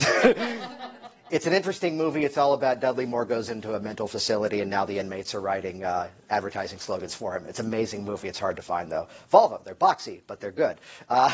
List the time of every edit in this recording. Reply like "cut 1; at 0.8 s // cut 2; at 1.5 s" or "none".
none